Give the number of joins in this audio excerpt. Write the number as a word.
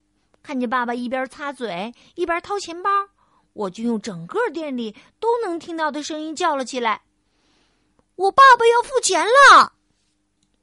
zero